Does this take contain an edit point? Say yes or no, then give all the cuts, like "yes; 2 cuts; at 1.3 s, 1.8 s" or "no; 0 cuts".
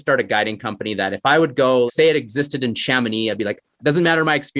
yes; 1 cut; at 1.9 s